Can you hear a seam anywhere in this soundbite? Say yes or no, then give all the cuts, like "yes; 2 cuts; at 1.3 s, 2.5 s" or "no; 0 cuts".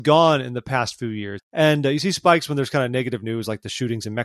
yes; 1 cut; at 1.4 s